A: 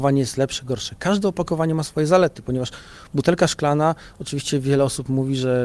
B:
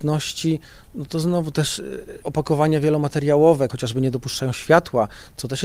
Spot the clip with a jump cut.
B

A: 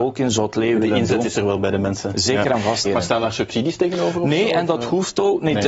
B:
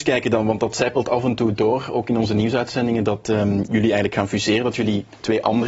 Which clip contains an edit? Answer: A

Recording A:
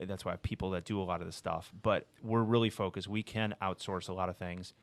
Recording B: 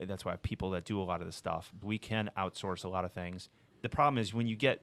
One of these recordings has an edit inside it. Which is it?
B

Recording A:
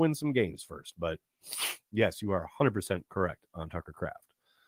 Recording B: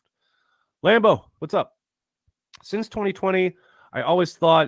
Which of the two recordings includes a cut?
B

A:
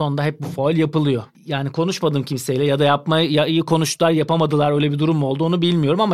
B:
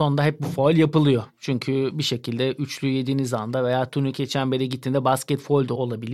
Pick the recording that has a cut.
A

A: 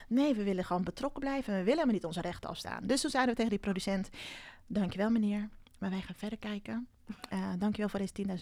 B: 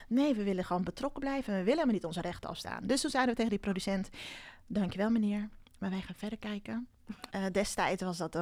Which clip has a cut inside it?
B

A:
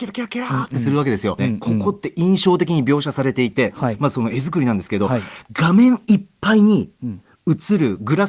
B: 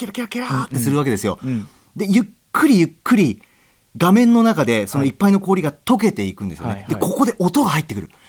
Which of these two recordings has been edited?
A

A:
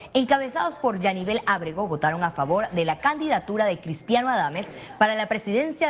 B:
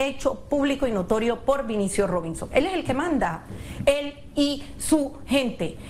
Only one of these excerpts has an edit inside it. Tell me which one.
B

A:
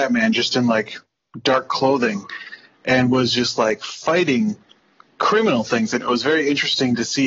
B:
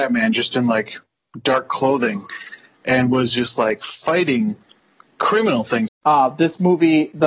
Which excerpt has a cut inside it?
B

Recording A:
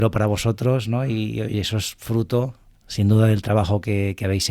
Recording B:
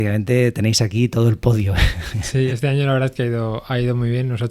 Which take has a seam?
B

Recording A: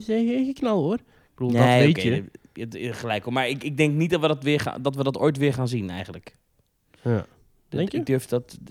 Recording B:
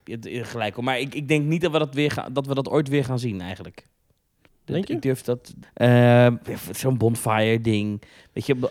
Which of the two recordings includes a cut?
B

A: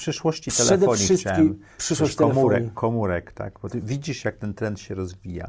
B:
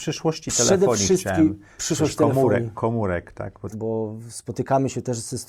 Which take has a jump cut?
B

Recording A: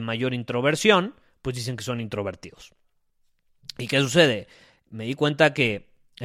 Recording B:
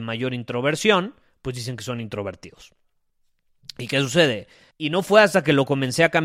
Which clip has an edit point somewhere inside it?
B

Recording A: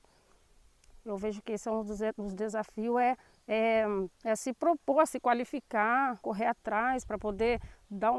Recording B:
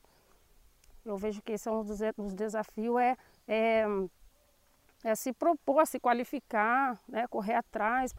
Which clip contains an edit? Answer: A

